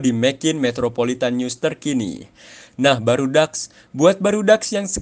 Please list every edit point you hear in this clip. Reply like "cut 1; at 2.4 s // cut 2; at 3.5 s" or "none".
none